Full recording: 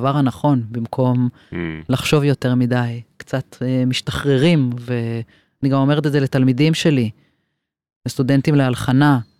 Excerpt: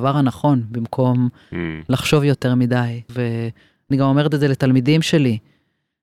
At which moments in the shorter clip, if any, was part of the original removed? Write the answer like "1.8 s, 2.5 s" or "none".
3.1 s